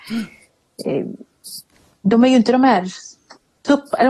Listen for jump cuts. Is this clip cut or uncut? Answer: uncut